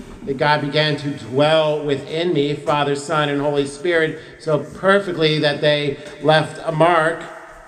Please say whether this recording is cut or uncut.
uncut